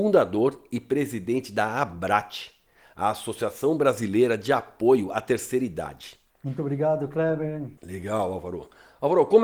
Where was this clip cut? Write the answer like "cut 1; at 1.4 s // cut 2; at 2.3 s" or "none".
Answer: cut 1; at 6.3 s // cut 2; at 7.8 s